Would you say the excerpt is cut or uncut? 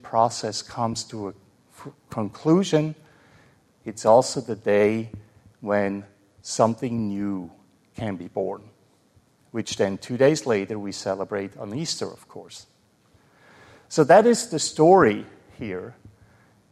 uncut